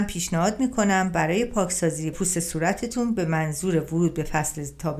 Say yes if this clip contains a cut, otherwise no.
yes